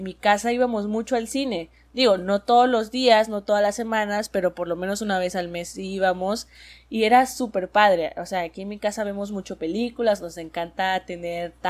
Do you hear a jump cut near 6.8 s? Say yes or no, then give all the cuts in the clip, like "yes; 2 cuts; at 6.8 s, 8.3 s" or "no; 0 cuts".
no; 0 cuts